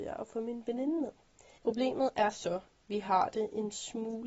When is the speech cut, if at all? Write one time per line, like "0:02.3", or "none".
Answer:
0:01.6
0:02.7